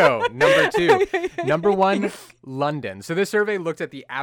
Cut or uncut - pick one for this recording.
uncut